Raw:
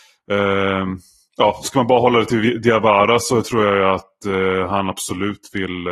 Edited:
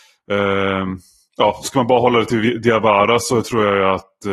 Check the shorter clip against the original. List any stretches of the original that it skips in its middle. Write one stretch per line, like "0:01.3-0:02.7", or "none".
none